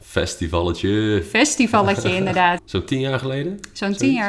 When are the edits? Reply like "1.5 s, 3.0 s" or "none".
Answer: 2.6 s